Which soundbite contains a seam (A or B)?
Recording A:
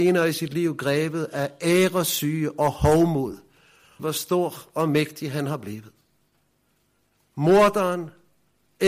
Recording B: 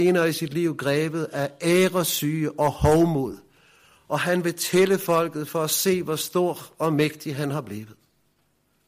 A